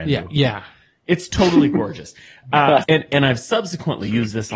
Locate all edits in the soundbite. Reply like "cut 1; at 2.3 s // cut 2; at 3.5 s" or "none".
cut 1; at 2.8 s